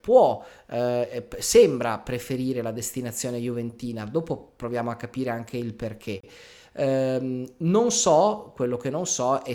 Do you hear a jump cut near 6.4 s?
no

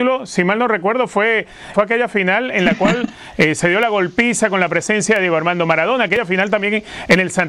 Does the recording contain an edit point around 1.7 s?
yes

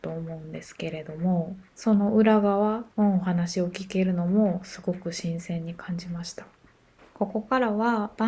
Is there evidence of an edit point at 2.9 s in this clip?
yes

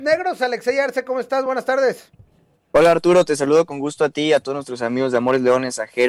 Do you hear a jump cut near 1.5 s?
no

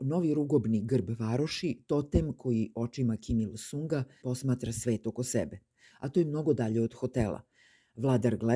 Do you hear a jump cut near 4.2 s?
yes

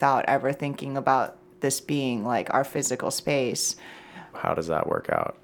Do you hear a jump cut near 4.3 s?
yes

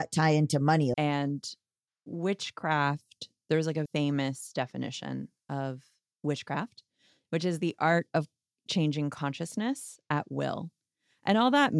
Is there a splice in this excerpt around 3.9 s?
yes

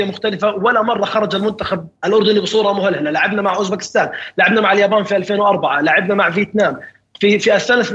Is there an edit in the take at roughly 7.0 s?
no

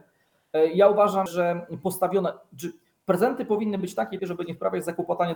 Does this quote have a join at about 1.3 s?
yes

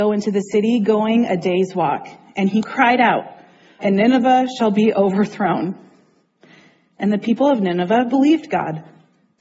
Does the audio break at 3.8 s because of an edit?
yes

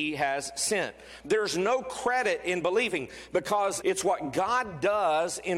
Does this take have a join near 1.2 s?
yes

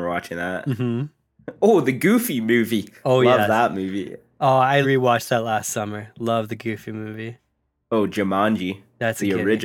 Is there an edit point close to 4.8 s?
yes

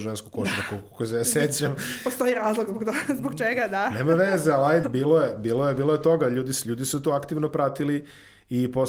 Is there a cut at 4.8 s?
yes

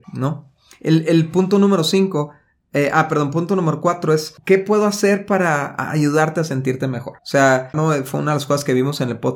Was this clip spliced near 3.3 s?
no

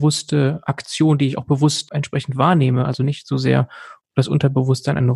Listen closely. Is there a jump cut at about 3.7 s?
no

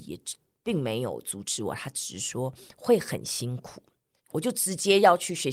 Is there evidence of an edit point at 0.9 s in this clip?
no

